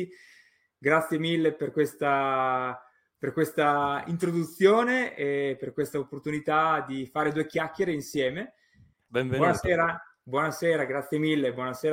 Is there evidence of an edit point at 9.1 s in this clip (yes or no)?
yes